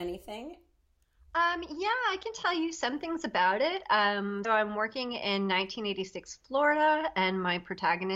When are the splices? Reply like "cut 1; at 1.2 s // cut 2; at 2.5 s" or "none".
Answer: cut 1; at 4.4 s

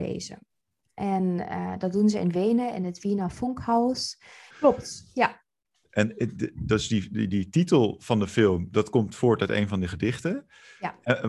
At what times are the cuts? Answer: cut 1; at 4.5 s

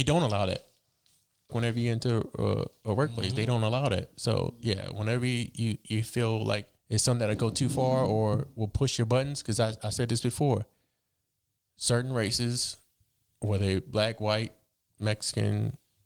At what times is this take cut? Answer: cut 1; at 1.5 s // cut 2; at 6.8 s

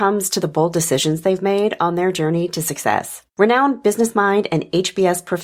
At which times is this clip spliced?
cut 1; at 3.3 s

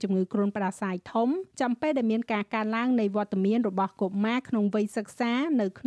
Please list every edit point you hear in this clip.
cut 1; at 1.5 s

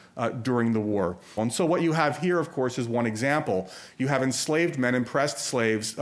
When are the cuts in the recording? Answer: cut 1; at 1.4 s

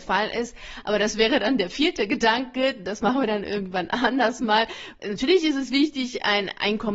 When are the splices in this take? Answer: cut 1; at 5.0 s

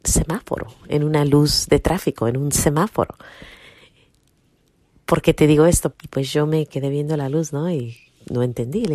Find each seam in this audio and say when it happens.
cut 1; at 5.9 s

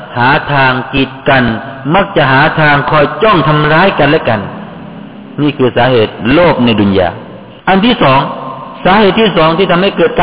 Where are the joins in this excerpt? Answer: cut 1; at 7.6 s

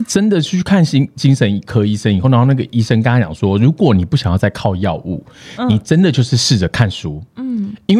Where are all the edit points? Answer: none

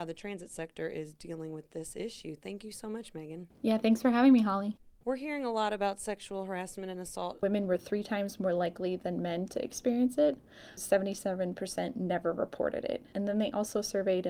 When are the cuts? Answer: cut 1; at 5.0 s // cut 2; at 7.4 s // cut 3; at 10.8 s

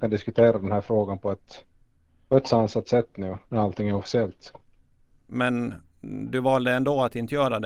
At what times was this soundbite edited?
cut 1; at 3.5 s // cut 2; at 5.3 s

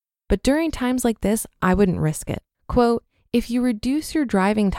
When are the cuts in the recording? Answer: cut 1; at 2.5 s

